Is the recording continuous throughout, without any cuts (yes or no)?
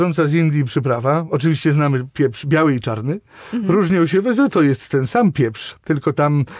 yes